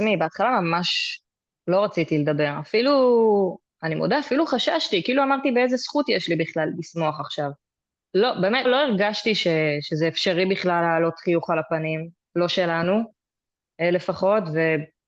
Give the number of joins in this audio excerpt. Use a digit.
1